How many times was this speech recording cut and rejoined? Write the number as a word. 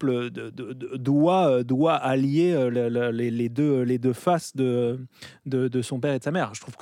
zero